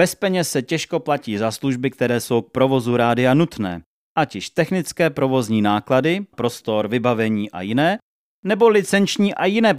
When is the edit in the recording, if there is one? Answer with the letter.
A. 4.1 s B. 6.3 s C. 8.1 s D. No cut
B